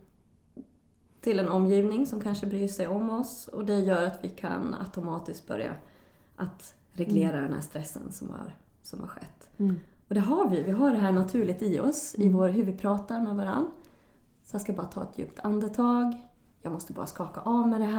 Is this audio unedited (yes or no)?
yes